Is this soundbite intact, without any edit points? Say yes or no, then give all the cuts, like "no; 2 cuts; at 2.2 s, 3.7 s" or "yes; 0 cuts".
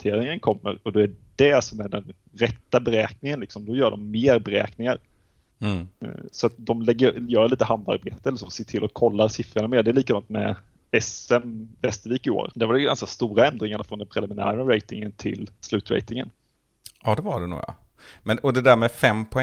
no; 1 cut; at 6.6 s